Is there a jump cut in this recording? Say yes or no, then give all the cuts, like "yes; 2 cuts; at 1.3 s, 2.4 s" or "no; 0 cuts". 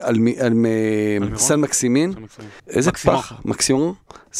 yes; 1 cut; at 2.6 s